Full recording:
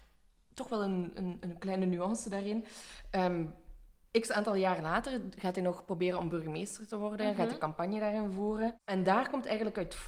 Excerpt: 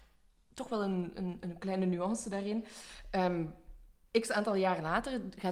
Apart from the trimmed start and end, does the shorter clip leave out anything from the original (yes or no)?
no